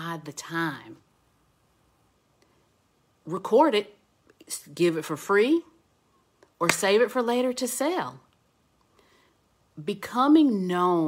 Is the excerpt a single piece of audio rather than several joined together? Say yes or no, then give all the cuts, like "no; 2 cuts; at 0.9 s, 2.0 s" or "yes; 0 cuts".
yes; 0 cuts